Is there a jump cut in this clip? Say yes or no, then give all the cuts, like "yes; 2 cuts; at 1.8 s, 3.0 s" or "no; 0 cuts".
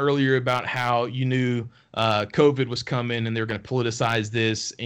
no; 0 cuts